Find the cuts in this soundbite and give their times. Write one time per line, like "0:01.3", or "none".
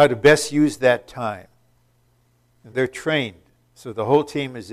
0:02.7